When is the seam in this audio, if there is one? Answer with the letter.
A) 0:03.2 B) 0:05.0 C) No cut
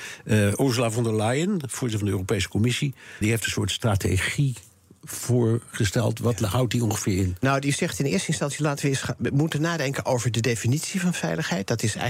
A